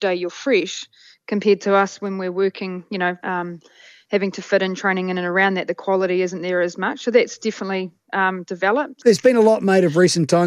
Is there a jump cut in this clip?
yes; 1 cut; at 3.2 s

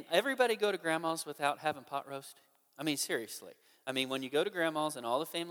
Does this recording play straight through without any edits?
yes; 0 cuts

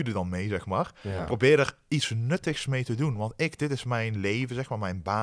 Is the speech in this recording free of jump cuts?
yes; 0 cuts

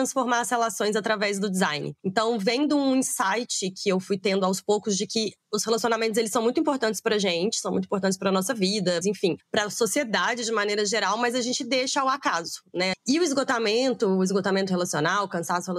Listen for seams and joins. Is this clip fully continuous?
no; 2 cuts; at 9.0 s, 12.9 s

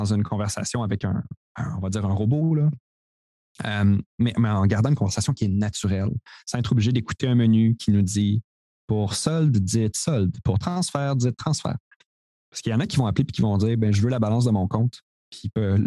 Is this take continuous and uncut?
yes; 0 cuts

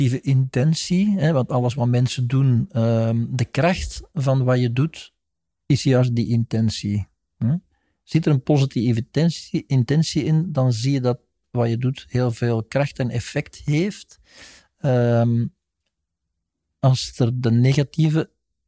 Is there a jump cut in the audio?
no; 0 cuts

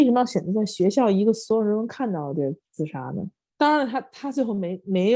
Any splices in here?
yes; 1 cut; at 3.5 s

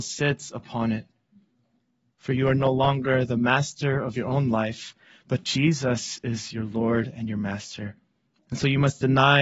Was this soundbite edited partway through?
yes; 1 cut; at 8.4 s

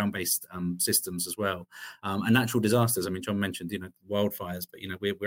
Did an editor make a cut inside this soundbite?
no; 0 cuts

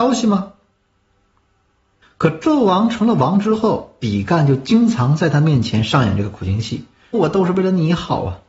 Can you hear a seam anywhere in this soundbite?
yes; 2 cuts; at 2.0 s, 7.1 s

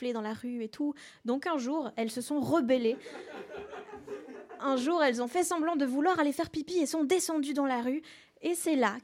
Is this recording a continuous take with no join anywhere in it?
yes; 0 cuts

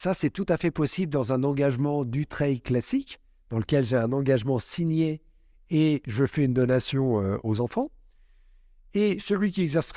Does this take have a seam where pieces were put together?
no; 0 cuts

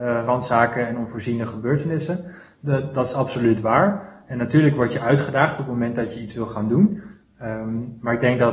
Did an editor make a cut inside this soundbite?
no; 0 cuts

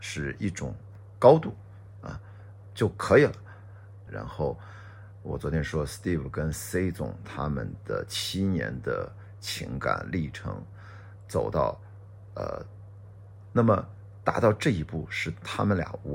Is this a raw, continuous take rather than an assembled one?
no; 2 cuts; at 4.1 s, 13.5 s

